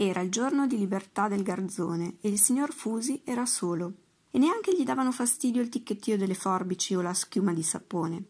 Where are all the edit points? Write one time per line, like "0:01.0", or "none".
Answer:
0:04.3